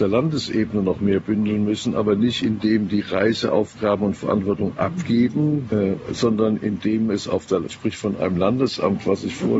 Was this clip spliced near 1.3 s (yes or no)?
no